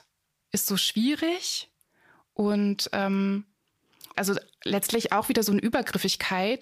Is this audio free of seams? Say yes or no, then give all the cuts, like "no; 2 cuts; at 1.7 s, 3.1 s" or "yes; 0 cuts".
no; 1 cut; at 4.1 s